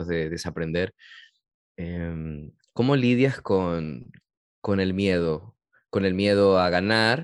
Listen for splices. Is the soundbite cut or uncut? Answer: uncut